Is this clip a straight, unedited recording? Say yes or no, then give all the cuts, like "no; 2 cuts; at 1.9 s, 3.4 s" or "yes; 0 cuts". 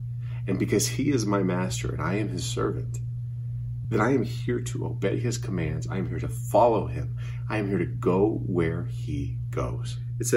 yes; 0 cuts